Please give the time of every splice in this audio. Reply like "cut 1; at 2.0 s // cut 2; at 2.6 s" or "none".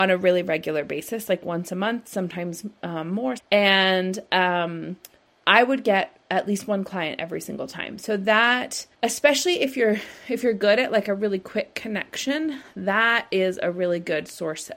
cut 1; at 3.4 s // cut 2; at 8.9 s